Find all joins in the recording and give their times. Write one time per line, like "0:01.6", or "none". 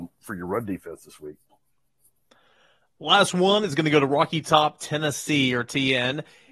none